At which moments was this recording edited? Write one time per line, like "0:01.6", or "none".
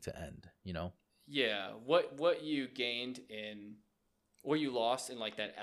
0:01.1